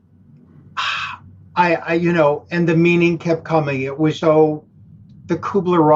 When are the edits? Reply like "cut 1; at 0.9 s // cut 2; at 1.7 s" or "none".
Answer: cut 1; at 4.2 s